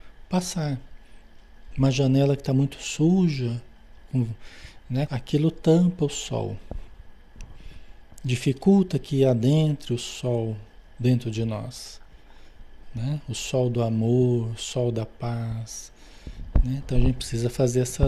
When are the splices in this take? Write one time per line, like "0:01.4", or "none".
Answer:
0:05.1